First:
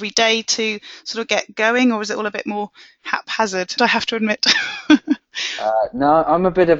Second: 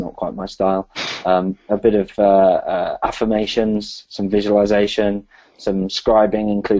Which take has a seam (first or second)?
first